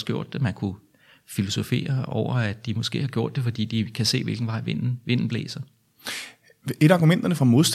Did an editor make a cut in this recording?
no; 0 cuts

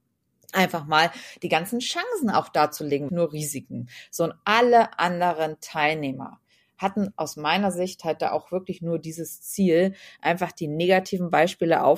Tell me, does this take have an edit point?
yes; 1 cut; at 3.1 s

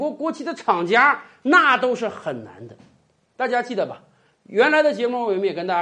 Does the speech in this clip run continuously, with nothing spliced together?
yes; 0 cuts

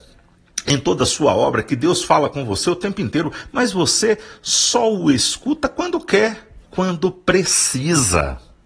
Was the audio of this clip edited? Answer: yes; 1 cut; at 6.6 s

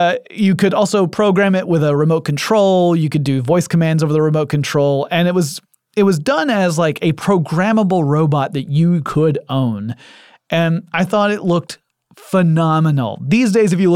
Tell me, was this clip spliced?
no; 0 cuts

